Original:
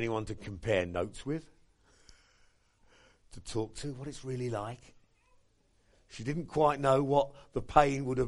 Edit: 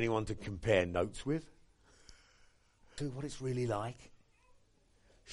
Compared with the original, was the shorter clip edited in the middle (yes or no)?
yes